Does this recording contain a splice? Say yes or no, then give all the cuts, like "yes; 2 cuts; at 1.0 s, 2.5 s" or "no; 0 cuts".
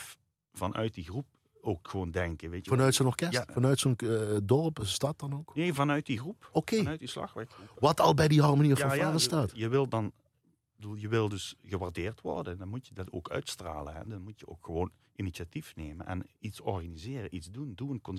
no; 0 cuts